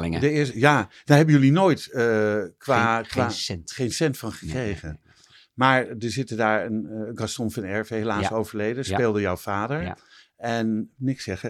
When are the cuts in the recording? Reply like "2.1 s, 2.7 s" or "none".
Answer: none

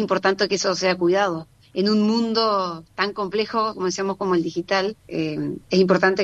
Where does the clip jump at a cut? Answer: 5.0 s

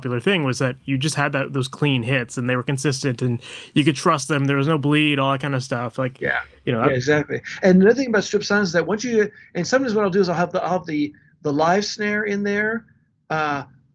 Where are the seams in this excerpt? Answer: none

